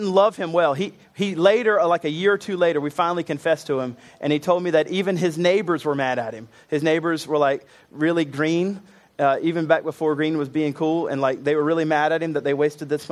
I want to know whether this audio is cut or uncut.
uncut